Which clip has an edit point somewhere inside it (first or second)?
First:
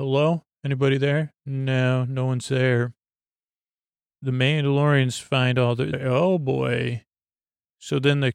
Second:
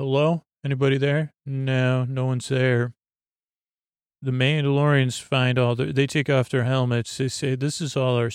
first